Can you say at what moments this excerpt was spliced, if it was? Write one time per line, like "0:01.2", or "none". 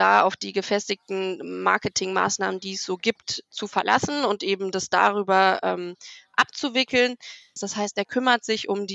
0:07.6